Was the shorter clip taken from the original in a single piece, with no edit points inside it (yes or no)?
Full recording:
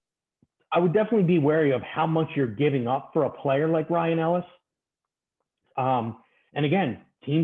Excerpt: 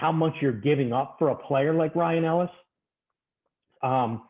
yes